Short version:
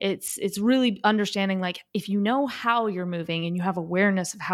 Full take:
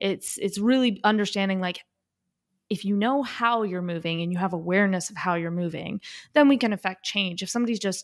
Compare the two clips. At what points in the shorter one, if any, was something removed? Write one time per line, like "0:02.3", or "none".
0:01.9